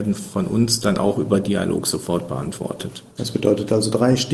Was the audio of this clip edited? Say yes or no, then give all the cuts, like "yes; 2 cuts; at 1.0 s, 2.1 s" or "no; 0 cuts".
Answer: yes; 1 cut; at 3.1 s